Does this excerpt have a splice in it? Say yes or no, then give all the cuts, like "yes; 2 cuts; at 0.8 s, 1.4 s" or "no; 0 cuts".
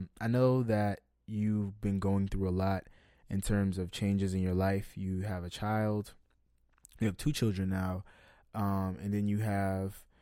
no; 0 cuts